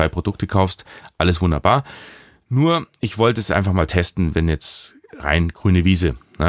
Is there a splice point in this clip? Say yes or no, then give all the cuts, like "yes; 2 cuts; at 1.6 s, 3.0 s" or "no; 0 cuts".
no; 0 cuts